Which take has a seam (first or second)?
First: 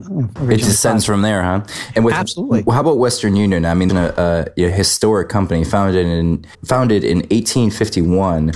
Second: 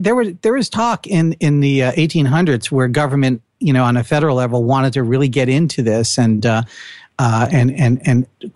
first